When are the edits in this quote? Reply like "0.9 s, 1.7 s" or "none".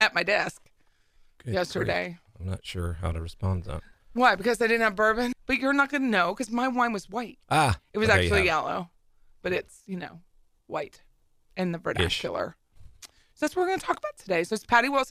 5.3 s